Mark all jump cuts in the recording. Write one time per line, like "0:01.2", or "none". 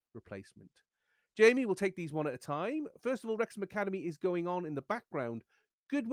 none